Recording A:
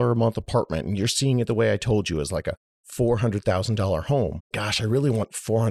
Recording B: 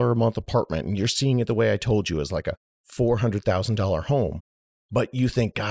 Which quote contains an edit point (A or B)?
A